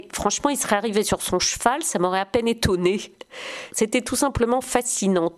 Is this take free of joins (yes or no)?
no